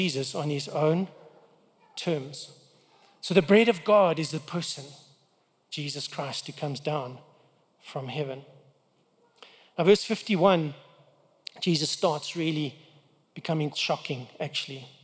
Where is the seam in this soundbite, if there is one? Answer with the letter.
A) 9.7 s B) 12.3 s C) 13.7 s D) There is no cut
C